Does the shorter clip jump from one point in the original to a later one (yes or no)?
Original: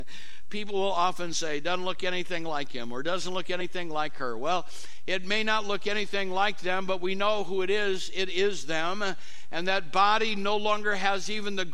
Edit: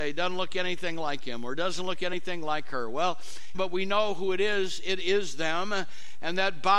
yes